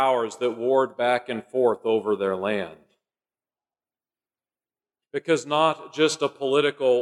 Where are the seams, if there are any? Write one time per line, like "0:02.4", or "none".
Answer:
0:05.0

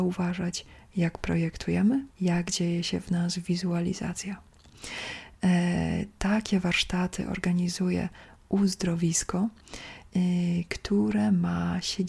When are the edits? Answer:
0:02.1

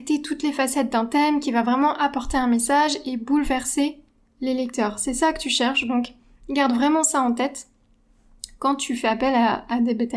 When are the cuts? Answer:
none

